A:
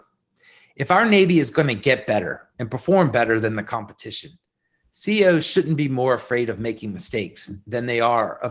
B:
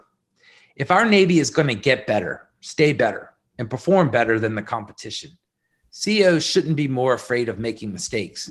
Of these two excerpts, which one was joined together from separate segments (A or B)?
A